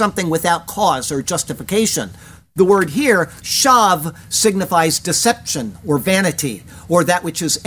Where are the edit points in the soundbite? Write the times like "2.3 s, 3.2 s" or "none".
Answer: none